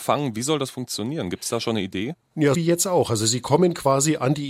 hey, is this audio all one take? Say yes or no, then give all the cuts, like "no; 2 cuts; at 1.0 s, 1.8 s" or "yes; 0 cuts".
no; 1 cut; at 2.5 s